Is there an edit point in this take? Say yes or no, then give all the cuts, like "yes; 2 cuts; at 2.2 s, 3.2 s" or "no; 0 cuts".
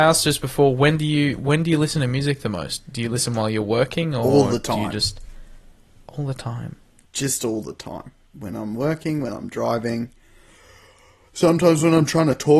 no; 0 cuts